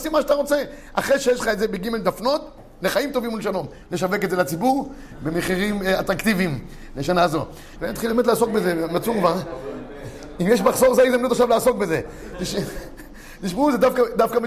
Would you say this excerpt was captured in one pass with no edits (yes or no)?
no